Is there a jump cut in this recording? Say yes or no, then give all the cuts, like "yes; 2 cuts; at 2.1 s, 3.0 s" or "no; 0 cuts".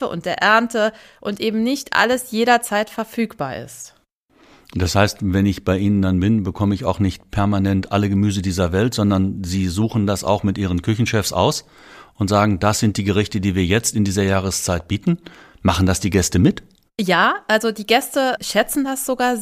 no; 0 cuts